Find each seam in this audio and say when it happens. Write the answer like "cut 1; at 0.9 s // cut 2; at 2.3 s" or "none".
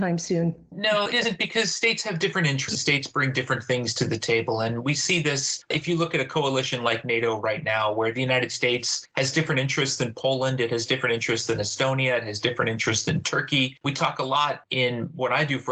cut 1; at 13.8 s